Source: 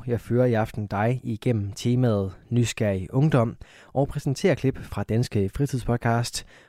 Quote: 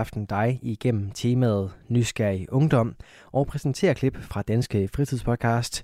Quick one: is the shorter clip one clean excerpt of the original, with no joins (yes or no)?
yes